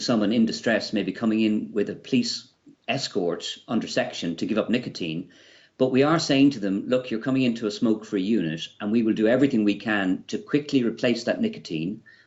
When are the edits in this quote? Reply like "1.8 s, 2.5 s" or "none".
none